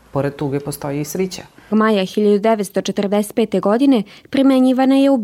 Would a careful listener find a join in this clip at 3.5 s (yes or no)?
no